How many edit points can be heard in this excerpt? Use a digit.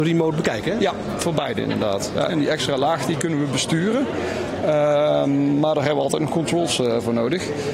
1